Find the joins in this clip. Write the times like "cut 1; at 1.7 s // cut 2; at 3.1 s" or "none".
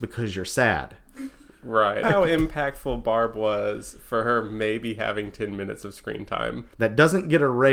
cut 1; at 2.0 s // cut 2; at 6.7 s